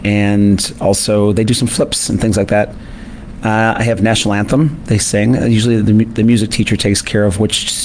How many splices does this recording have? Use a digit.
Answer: 0